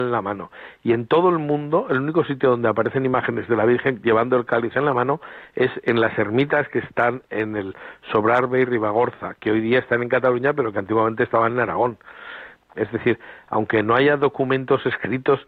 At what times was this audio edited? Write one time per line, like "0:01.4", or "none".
0:12.8

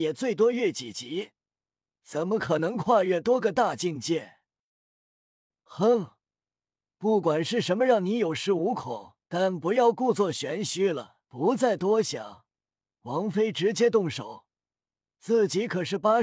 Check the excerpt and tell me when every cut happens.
0:09.2
0:11.2

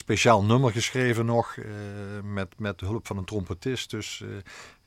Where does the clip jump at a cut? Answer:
none

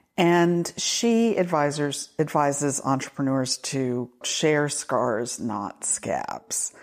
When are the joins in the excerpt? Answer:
0:04.2

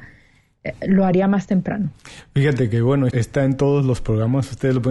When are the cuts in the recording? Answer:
0:03.1

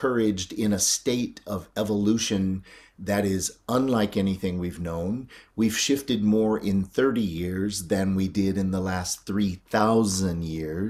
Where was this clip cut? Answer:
none

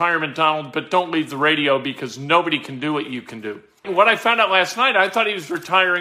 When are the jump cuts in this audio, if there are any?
0:03.8

